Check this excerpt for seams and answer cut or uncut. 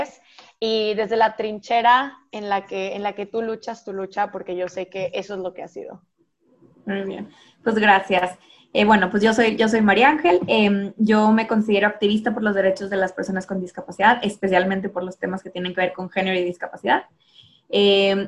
uncut